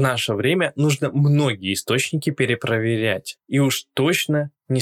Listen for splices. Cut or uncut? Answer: uncut